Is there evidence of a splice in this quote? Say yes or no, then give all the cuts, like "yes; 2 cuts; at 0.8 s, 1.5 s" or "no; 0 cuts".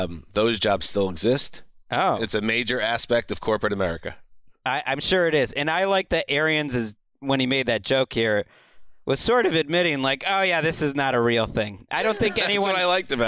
no; 0 cuts